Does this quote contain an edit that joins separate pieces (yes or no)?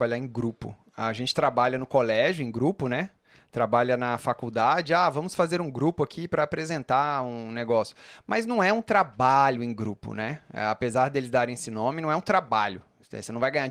no